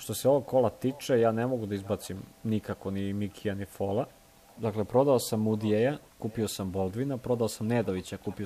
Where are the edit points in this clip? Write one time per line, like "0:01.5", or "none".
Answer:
0:02.3
0:04.6